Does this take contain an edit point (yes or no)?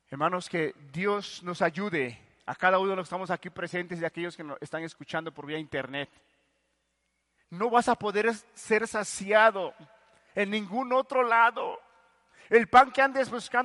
yes